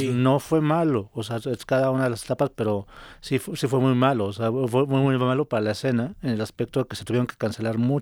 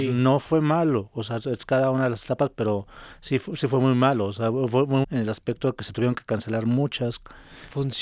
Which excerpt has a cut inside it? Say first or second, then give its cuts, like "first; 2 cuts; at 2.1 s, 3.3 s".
second; 1 cut; at 5.0 s